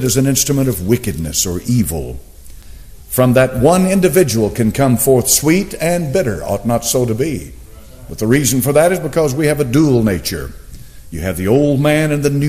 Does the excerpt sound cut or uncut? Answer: uncut